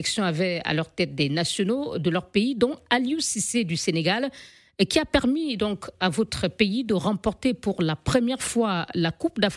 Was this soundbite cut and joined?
no; 0 cuts

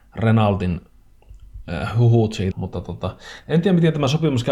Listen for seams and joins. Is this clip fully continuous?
no; 1 cut; at 2.5 s

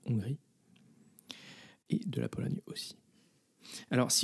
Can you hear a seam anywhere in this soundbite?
no; 0 cuts

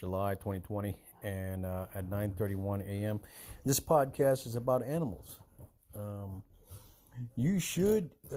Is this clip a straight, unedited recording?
yes; 0 cuts

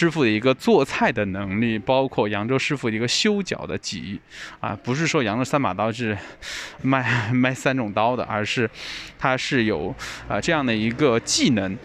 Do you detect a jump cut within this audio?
no; 0 cuts

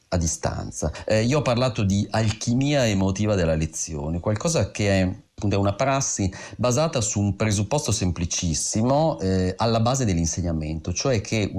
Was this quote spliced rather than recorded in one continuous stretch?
no; 0 cuts

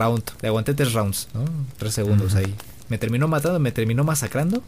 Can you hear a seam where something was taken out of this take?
no; 0 cuts

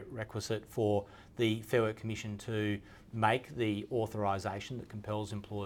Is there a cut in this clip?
no; 0 cuts

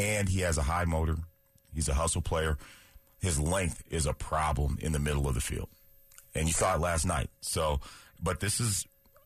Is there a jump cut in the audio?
no; 0 cuts

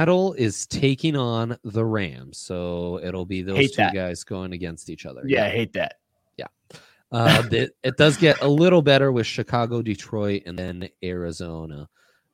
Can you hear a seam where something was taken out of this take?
no; 0 cuts

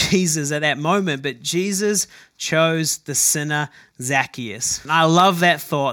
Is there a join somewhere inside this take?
yes; 1 cut; at 4.9 s

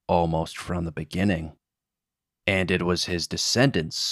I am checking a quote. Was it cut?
yes; 1 cut; at 2.4 s

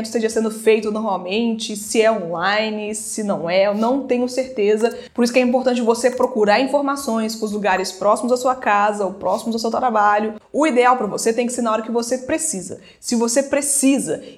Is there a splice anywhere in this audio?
yes; 1 cut; at 10.4 s

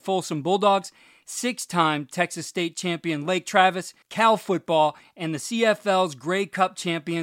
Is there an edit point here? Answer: yes; 1 cut; at 4.0 s

